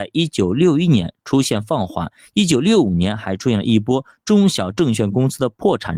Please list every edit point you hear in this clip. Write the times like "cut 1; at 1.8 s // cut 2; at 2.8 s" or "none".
cut 1; at 2.2 s